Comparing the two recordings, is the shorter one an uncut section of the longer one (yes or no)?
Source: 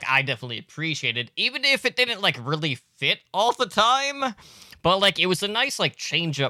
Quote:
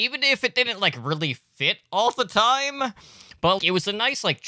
no